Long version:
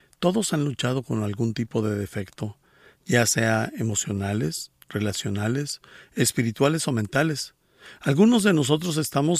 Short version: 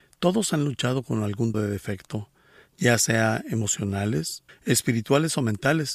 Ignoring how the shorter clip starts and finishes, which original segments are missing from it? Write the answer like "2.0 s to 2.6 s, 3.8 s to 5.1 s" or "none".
1.5 s to 1.8 s, 4.8 s to 6.0 s